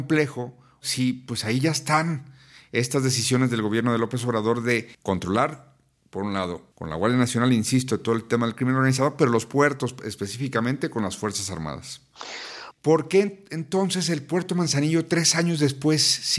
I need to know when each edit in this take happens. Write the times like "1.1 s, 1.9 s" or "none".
4.9 s, 6.7 s, 12.7 s